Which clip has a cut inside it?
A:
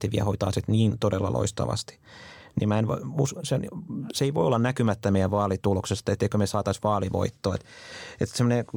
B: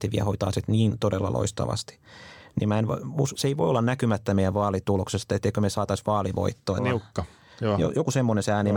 B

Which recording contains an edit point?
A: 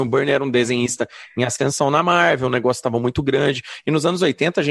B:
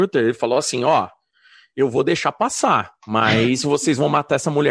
B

